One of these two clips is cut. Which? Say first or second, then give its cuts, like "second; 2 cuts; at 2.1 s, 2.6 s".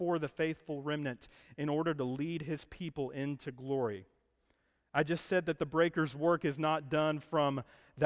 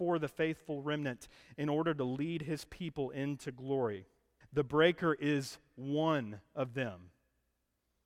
second; 1 cut; at 4.4 s